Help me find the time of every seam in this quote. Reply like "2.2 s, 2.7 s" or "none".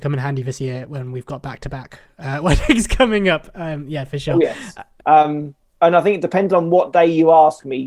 5.0 s